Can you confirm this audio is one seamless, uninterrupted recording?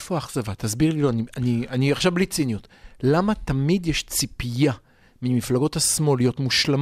yes; 0 cuts

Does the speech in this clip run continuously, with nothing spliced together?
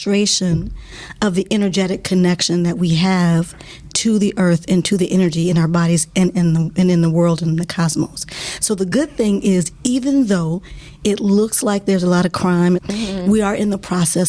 no; 1 cut; at 12.8 s

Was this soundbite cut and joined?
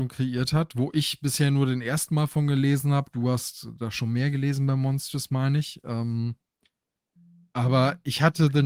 no; 0 cuts

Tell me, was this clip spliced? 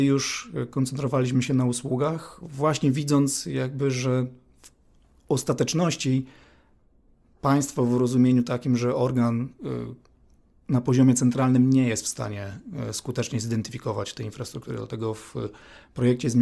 no; 0 cuts

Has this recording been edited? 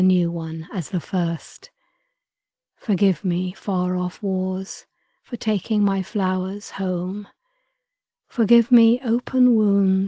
no; 0 cuts

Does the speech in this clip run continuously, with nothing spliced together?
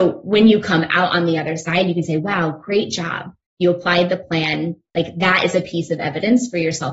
yes; 0 cuts

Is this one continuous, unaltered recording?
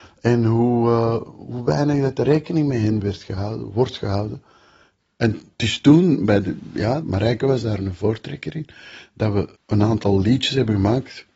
no; 2 cuts; at 7.0 s, 9.5 s

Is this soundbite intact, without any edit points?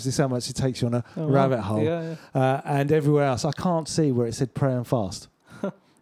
yes; 0 cuts

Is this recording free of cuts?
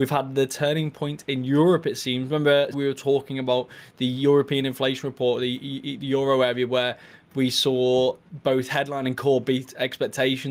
no; 1 cut; at 2.7 s

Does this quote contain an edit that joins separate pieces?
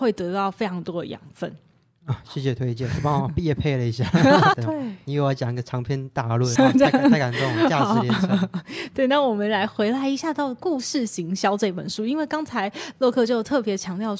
yes; 2 cuts; at 4.5 s, 6.6 s

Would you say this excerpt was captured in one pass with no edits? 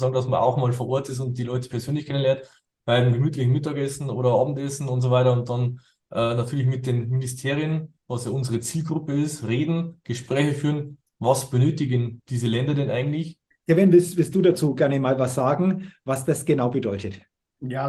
no; 1 cut; at 13.5 s

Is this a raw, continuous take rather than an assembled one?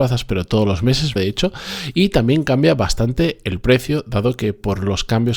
no; 1 cut; at 1.2 s

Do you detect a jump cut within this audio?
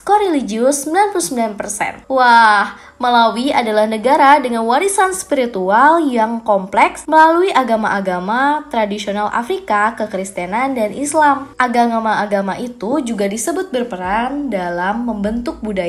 no; 0 cuts

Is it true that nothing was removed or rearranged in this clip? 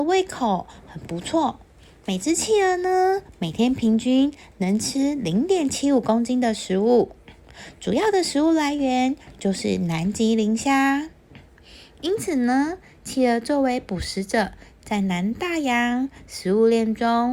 yes; 0 cuts

